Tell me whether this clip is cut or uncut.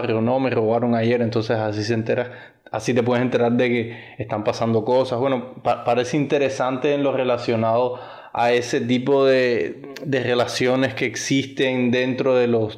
uncut